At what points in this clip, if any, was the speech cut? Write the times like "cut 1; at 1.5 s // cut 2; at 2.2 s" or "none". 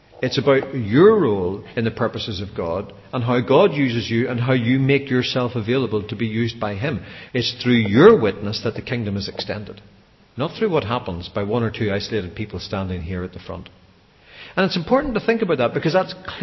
cut 1; at 7.3 s